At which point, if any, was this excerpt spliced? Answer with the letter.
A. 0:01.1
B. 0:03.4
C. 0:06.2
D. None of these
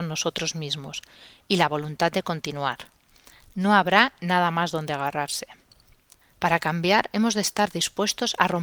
C